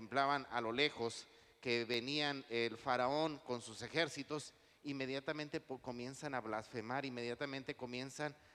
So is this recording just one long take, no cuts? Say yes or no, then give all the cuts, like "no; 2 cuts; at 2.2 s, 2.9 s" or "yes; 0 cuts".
yes; 0 cuts